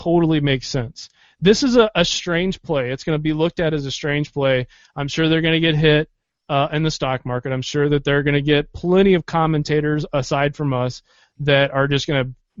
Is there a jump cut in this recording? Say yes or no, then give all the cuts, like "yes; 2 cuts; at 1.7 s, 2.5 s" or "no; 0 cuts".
no; 0 cuts